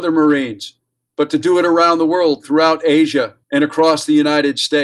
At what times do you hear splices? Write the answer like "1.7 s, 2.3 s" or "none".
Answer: 1.1 s, 3.4 s